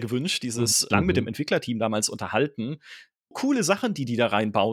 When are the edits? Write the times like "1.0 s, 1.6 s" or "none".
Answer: 0.9 s, 3.3 s